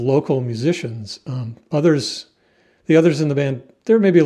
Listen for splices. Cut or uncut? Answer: uncut